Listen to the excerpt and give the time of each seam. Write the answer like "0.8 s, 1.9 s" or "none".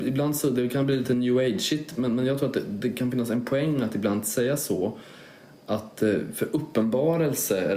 none